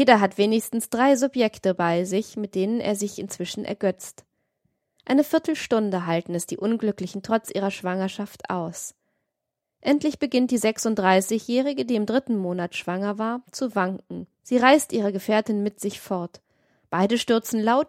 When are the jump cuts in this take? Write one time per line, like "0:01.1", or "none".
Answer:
none